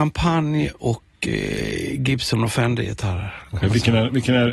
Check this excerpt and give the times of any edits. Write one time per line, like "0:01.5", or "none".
none